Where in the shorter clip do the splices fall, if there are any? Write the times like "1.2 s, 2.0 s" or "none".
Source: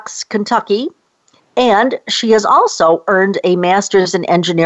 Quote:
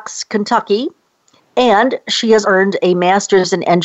2.4 s